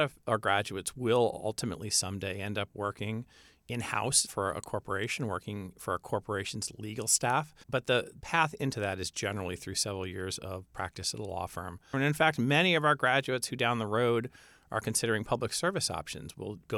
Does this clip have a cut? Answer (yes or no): yes